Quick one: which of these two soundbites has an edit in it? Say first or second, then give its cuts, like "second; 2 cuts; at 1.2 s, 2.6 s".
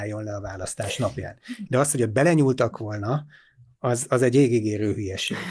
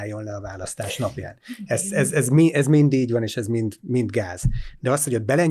first; 1 cut; at 1.7 s